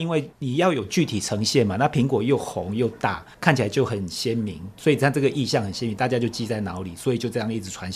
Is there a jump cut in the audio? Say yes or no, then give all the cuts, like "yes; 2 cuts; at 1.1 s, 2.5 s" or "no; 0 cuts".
no; 0 cuts